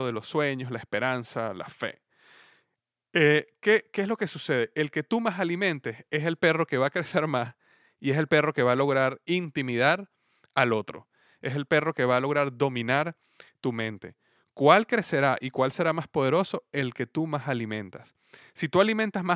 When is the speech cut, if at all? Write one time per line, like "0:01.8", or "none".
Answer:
none